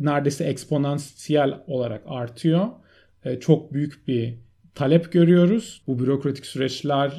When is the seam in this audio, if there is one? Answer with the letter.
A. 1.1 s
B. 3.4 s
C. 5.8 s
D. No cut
C